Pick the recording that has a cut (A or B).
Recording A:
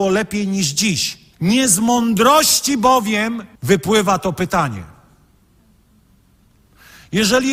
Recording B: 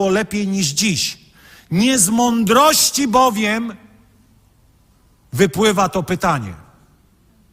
A